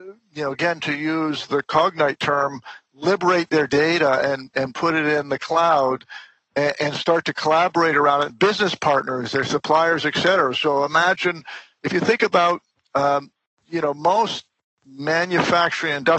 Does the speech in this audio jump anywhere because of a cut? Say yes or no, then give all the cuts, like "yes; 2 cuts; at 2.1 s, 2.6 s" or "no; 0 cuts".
yes; 1 cut; at 8.3 s